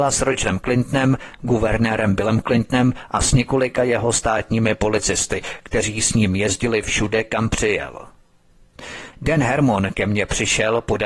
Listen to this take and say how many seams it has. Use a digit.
1